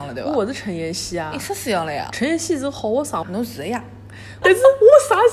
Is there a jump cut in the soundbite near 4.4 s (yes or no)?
yes